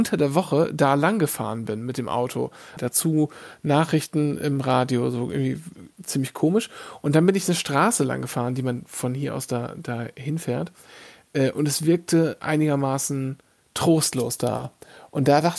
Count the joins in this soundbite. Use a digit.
1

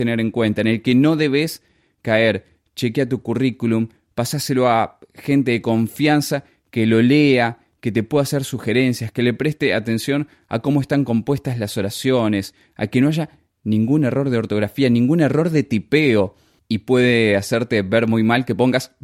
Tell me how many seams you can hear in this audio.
1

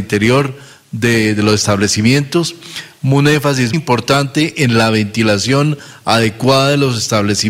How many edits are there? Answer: 1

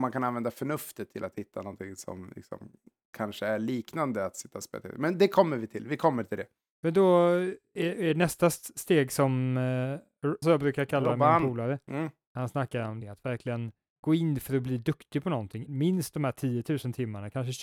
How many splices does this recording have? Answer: 3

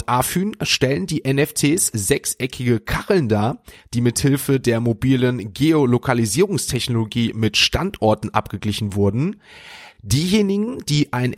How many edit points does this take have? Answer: 0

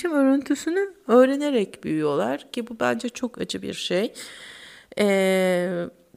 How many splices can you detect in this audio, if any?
0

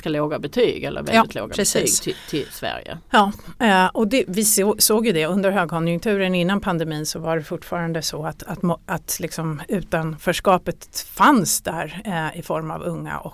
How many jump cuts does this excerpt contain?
0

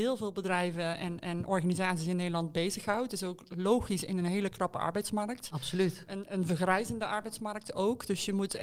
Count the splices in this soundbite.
0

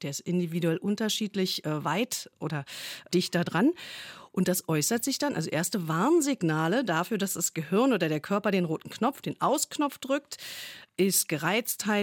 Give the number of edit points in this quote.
1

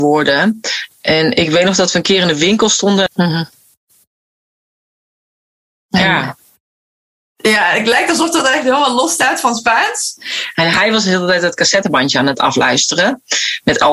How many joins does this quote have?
2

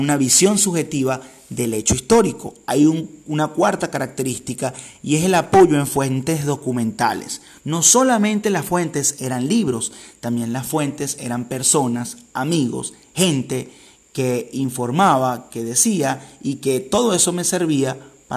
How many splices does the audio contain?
0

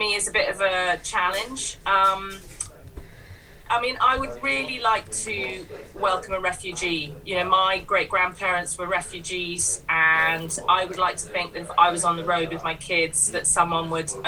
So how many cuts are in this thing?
0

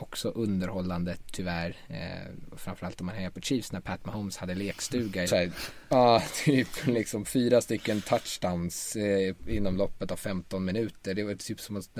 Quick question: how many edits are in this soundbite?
1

